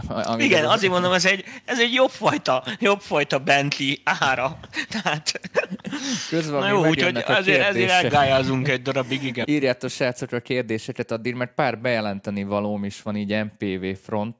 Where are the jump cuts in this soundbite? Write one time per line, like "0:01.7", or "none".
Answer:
0:09.4